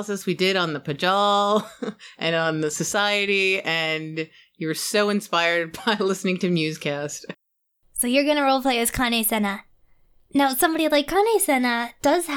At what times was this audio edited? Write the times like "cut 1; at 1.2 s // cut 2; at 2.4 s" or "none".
none

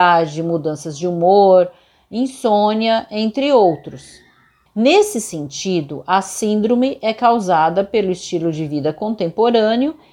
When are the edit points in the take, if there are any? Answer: cut 1; at 4.7 s

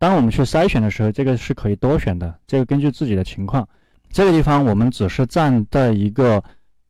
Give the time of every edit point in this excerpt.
none

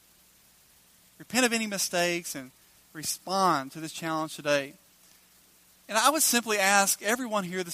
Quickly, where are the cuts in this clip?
none

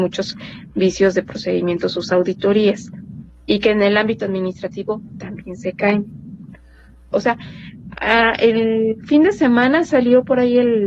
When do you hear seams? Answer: cut 1; at 7.1 s

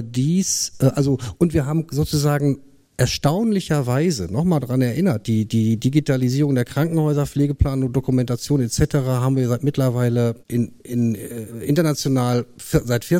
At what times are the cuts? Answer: cut 1; at 10.4 s

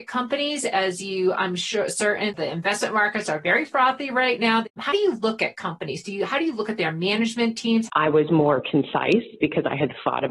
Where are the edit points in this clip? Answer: cut 1; at 7.9 s

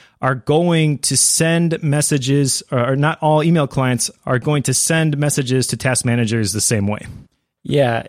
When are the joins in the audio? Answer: none

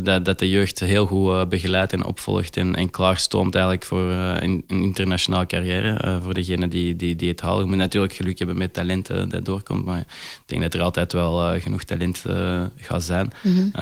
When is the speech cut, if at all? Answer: none

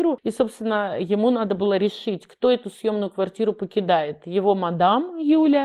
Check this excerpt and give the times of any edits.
none

